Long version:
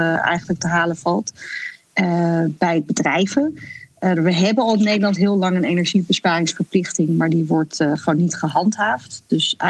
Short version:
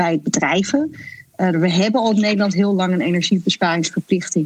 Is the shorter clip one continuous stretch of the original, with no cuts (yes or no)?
yes